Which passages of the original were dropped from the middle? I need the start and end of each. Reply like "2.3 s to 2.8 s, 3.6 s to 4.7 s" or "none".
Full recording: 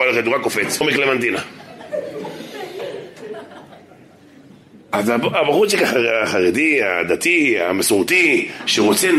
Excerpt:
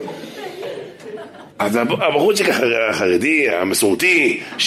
3.7 s to 4.8 s, 6.8 s to 7.6 s